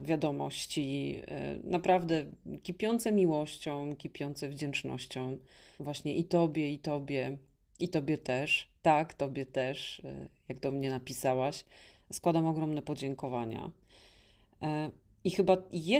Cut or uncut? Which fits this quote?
cut